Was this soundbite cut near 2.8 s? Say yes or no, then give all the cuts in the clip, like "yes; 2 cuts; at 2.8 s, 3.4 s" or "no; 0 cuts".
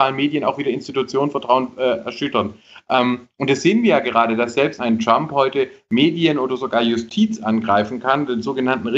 no; 1 cut; at 4.8 s